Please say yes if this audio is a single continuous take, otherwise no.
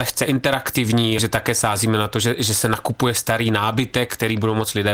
no